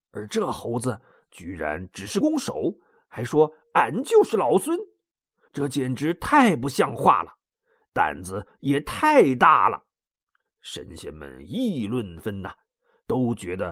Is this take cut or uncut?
cut